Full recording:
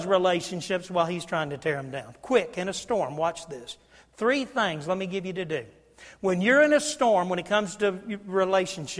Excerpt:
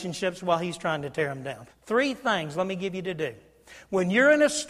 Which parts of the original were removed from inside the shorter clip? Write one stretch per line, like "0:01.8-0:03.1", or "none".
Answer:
0:02.2-0:04.0